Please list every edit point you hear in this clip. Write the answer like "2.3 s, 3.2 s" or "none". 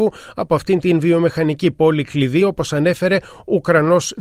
none